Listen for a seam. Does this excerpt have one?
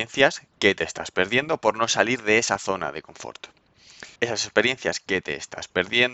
yes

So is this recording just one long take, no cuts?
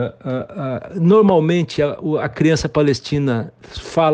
yes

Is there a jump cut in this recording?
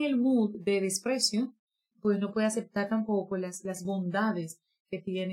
yes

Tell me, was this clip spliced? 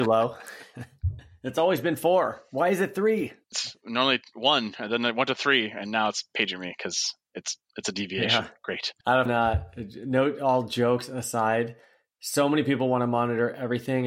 yes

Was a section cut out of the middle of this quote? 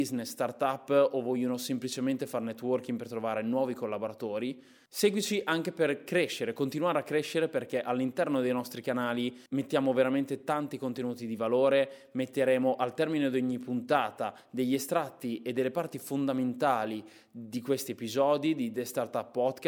yes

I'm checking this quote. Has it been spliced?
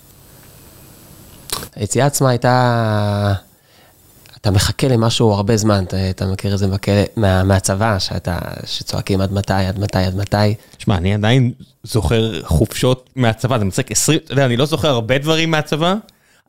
no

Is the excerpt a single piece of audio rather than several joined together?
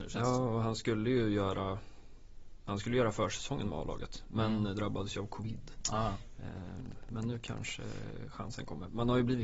yes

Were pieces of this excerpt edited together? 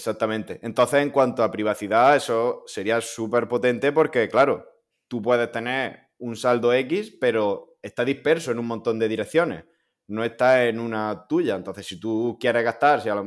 no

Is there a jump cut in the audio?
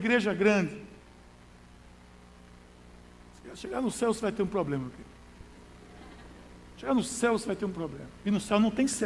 no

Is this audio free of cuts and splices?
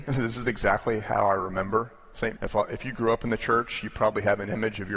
no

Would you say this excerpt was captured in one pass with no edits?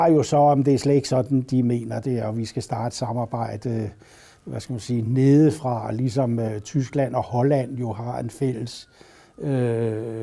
yes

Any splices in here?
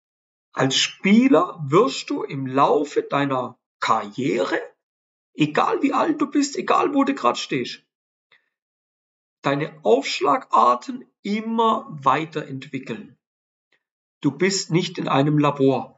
yes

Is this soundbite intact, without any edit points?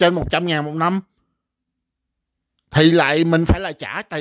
yes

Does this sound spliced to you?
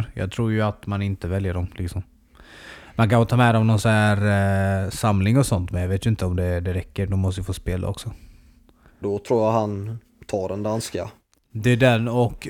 yes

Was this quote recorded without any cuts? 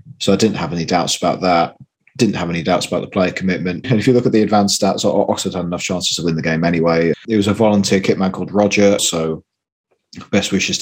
no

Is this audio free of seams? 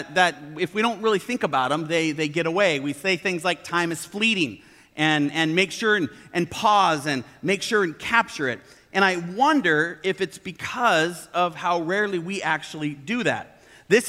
yes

